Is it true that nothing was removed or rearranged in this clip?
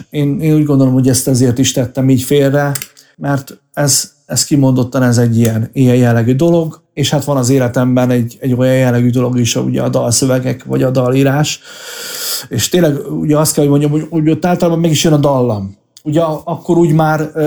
yes; 0 cuts

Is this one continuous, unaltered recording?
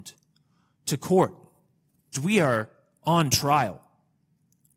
no; 1 cut; at 2.1 s

